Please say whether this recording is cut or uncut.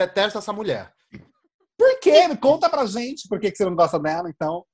uncut